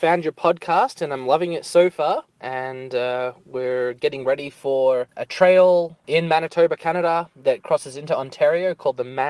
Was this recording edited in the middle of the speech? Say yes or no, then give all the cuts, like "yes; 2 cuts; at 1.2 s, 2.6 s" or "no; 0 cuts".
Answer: yes; 1 cut; at 2.4 s